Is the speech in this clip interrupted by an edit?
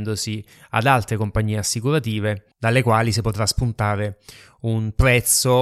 yes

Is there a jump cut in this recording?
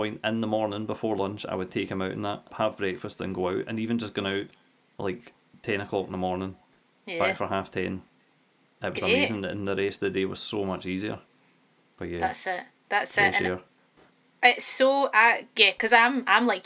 yes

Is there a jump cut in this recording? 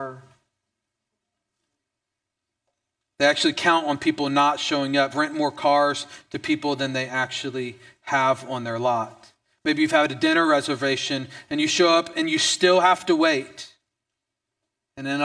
yes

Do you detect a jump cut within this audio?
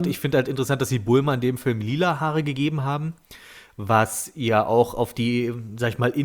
no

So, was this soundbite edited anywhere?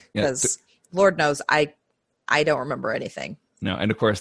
no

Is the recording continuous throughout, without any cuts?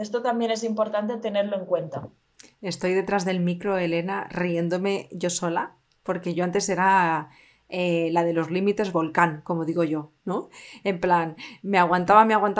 yes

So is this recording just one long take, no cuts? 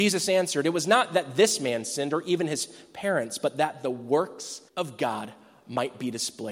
no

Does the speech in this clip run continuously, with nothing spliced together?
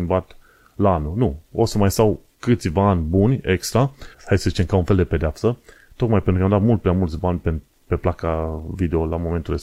no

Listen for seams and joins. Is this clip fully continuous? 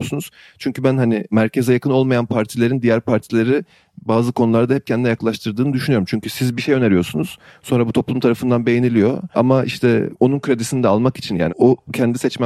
no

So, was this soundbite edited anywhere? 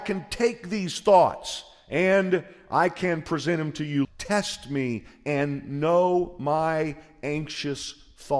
yes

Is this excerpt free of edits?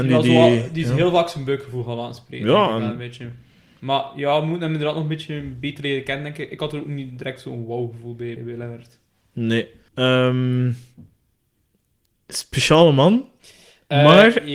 no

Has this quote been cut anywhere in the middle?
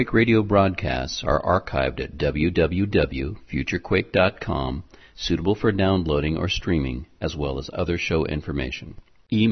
no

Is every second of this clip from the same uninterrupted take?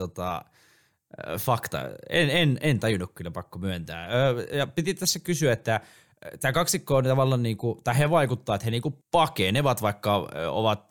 no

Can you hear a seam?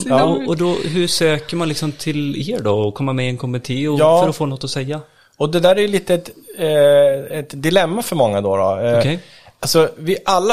no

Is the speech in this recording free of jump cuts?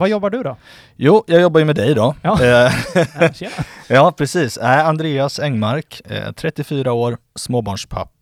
yes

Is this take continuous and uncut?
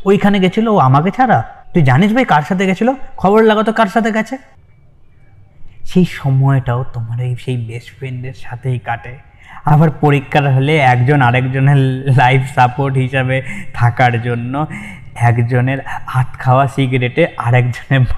no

